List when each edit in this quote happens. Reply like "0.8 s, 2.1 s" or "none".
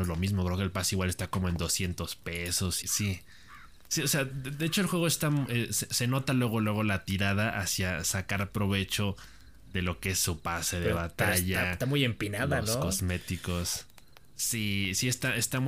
2.8 s